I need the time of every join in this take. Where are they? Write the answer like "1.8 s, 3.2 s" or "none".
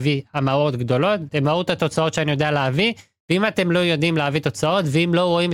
1.3 s